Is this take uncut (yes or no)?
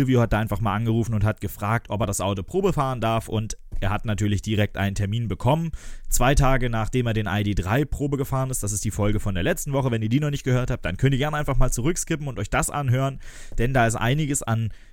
yes